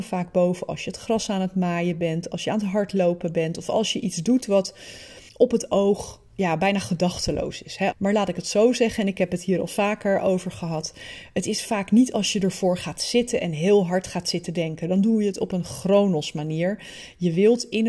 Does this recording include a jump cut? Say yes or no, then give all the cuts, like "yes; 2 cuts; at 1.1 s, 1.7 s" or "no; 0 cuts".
yes; 2 cuts; at 5.3 s, 7.9 s